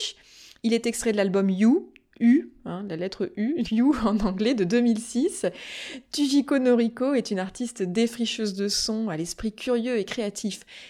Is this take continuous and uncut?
no; 1 cut; at 3.6 s

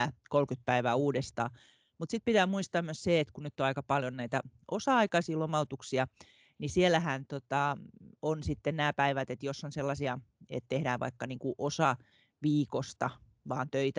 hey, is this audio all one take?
yes; 0 cuts

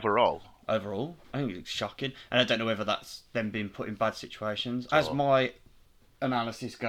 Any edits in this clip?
yes; 2 cuts; at 1.2 s, 4.9 s

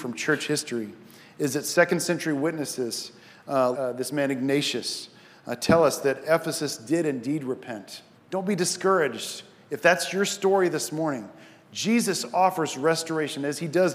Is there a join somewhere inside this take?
yes; 2 cuts; at 3.7 s, 8.1 s

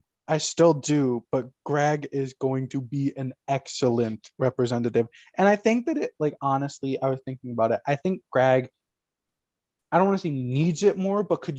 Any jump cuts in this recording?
no; 0 cuts

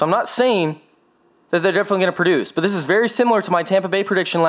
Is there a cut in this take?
no; 0 cuts

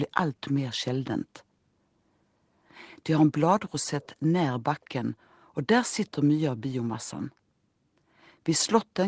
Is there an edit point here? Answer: yes; 2 cuts; at 3.0 s, 5.2 s

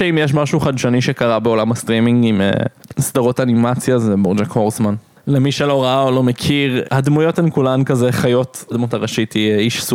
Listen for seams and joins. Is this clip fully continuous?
no; 2 cuts; at 6.8 s, 8.7 s

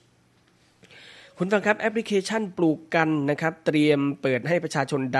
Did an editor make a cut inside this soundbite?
no; 0 cuts

